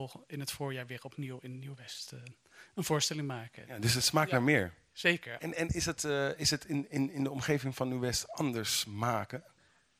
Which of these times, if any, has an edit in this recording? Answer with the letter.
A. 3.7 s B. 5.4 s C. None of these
B